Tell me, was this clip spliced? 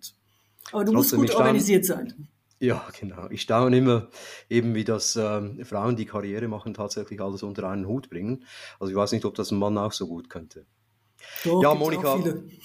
no; 0 cuts

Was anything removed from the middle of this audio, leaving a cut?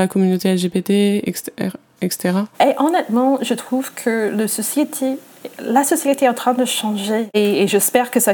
yes; 1 cut; at 2.5 s

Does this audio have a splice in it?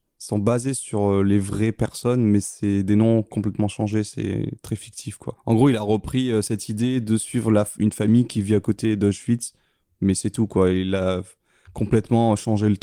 no; 0 cuts

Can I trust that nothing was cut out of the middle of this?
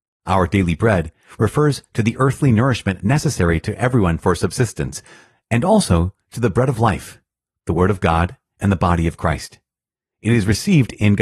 yes; 0 cuts

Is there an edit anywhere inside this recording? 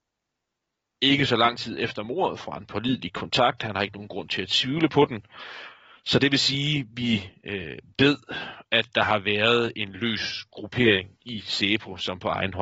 no; 0 cuts

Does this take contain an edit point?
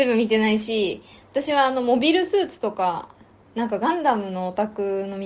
no; 0 cuts

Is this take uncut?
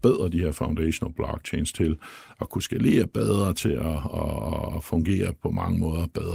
yes; 0 cuts

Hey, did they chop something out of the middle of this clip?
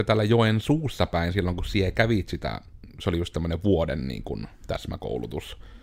no; 0 cuts

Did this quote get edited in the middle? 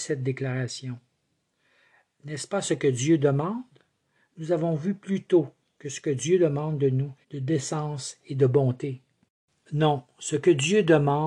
yes; 1 cut; at 7.2 s

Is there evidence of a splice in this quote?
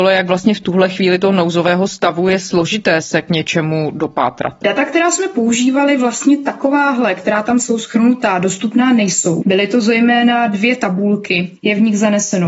yes; 2 cuts; at 9.4 s, 11.6 s

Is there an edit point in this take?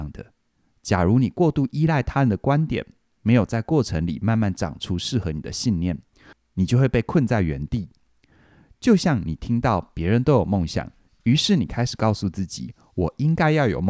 no; 0 cuts

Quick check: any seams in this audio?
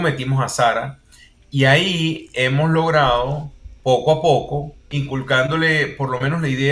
yes; 1 cut; at 4.9 s

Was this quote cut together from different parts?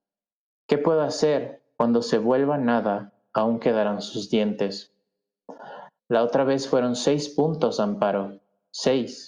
yes; 2 cuts; at 1.7 s, 6.0 s

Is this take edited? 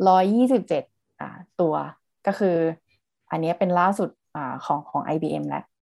no; 0 cuts

